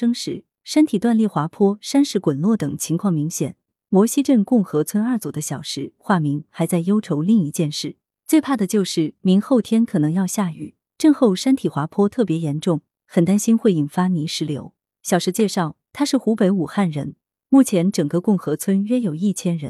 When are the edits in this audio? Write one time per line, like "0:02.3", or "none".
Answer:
0:03.7